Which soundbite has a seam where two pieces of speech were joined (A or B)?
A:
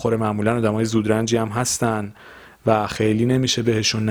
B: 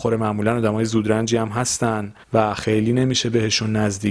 B